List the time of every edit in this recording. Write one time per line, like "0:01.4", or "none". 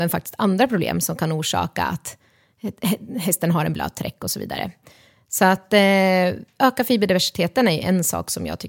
none